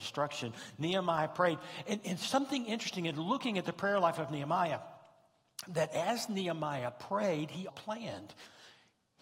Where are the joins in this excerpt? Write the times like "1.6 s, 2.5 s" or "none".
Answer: 7.7 s